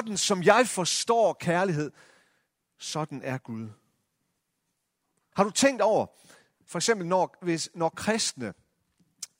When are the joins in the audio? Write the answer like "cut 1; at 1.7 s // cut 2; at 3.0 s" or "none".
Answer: cut 1; at 5.3 s